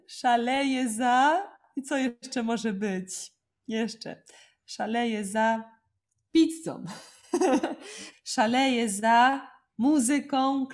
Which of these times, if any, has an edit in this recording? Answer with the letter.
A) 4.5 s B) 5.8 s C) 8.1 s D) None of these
C